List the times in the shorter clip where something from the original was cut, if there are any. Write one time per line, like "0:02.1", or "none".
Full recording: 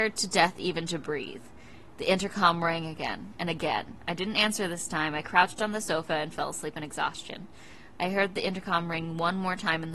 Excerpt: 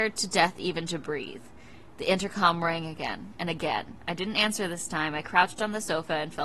none